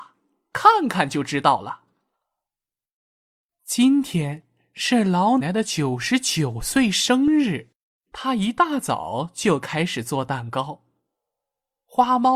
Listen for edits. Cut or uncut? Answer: cut